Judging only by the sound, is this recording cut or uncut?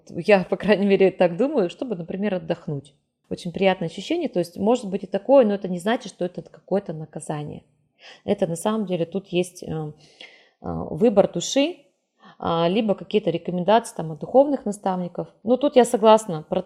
cut